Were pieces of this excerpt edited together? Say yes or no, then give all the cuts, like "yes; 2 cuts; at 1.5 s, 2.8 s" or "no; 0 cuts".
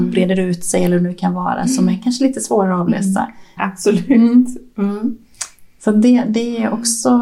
yes; 1 cut; at 3.6 s